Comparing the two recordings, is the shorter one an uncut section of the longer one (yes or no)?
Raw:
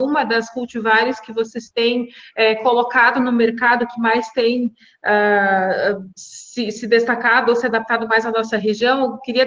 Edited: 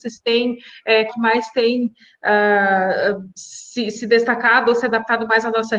no